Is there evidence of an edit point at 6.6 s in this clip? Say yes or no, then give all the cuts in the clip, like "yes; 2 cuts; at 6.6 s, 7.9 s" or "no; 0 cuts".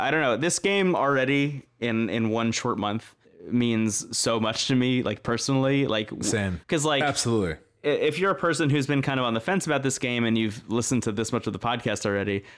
yes; 1 cut; at 6.6 s